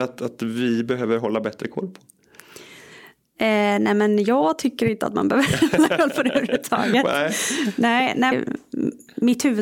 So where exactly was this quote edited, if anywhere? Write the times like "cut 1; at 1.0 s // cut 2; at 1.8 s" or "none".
cut 1; at 8.3 s